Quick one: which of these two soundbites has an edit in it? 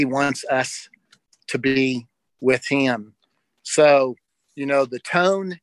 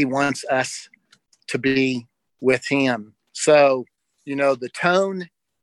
second; 1 cut; at 3.2 s

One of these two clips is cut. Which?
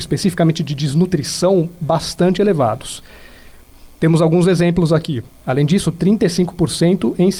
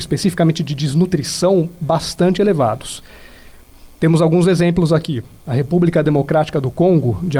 first; 1 cut; at 5.3 s

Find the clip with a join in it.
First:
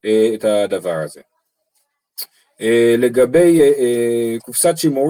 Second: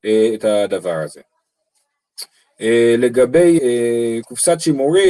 second; 1 cut; at 3.6 s

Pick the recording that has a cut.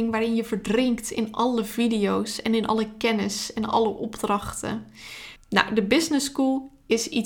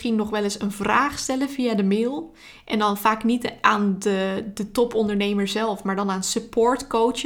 first; 1 cut; at 5.4 s

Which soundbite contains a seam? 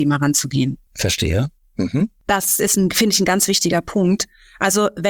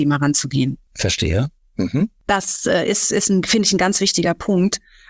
first; 1 cut; at 2.6 s

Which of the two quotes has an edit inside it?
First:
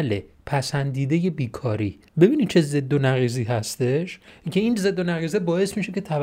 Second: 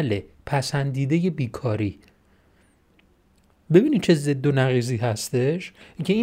first; 1 cut; at 2.1 s

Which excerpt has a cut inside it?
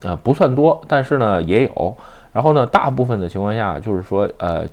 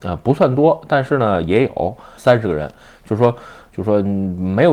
second; 2 cuts; at 2.2 s, 3.7 s

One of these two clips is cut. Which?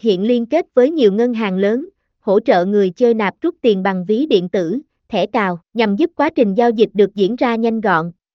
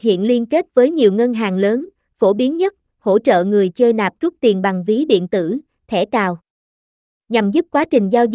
first; 2 cuts; at 2.1 s, 5.7 s

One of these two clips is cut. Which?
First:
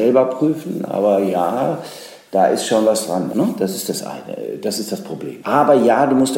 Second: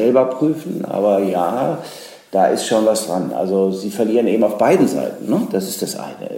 first; 2 cuts; at 3.3 s, 5.4 s

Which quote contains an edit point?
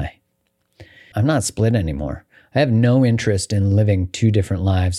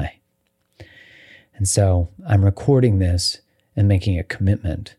first; 1 cut; at 1.1 s

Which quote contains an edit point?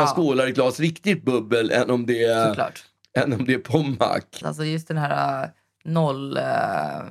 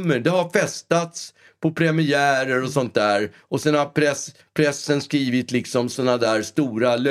first; 1 cut; at 4.4 s

